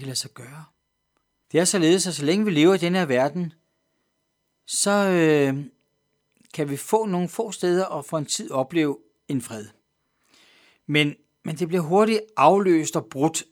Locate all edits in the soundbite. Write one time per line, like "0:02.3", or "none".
0:01.4